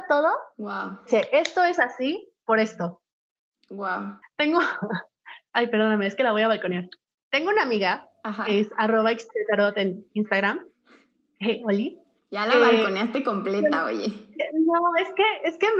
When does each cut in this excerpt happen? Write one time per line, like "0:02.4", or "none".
0:04.2

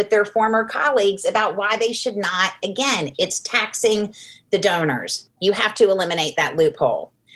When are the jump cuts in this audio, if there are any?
0:03.1
0:05.3

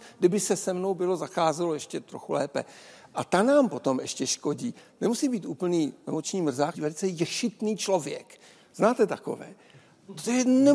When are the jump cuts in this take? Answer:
0:06.7

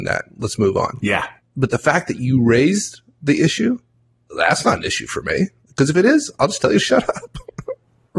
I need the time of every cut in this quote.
none

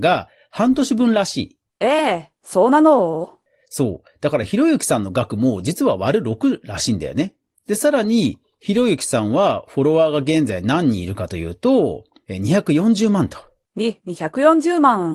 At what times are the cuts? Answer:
none

